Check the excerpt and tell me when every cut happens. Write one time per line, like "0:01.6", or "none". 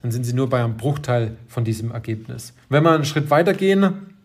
0:02.6